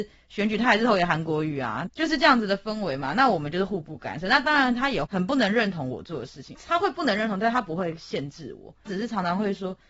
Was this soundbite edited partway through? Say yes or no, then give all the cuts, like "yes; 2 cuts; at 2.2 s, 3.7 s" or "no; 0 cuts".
no; 0 cuts